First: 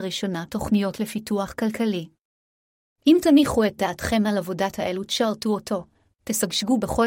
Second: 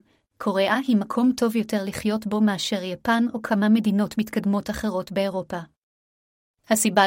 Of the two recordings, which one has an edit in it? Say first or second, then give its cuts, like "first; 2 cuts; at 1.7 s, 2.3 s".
first; 1 cut; at 3.0 s